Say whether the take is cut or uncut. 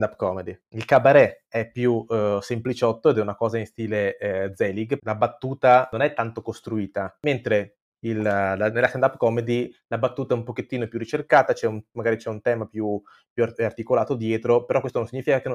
cut